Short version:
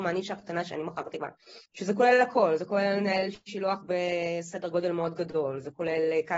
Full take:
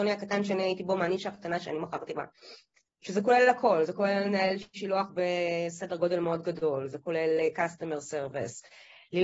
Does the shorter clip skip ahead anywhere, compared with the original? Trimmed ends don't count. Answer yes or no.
yes